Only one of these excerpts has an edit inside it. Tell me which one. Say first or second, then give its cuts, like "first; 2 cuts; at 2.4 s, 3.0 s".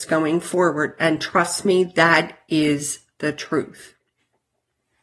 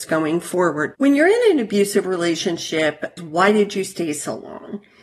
second; 2 cuts; at 0.9 s, 3.2 s